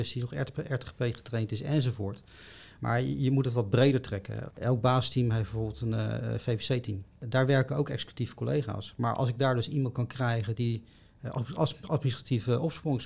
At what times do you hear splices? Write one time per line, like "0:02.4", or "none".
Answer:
none